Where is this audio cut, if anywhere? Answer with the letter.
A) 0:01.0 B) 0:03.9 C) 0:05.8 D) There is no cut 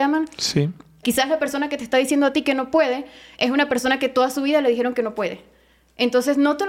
A